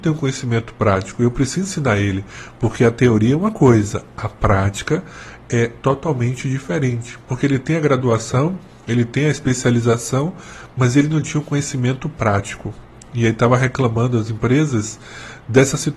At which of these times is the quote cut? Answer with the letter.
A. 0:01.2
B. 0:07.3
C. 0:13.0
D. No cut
B